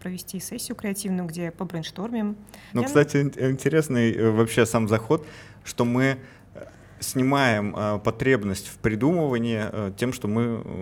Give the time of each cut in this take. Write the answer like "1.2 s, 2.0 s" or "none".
2.7 s